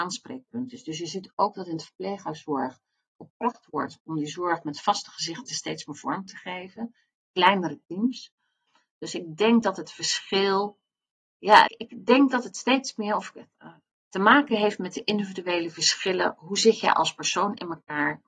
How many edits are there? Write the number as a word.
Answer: one